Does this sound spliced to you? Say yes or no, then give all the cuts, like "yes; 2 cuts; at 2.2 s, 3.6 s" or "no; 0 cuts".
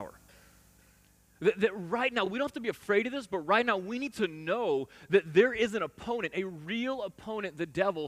no; 0 cuts